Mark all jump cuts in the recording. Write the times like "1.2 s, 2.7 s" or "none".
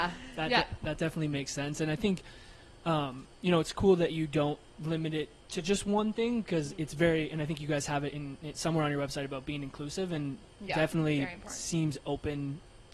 none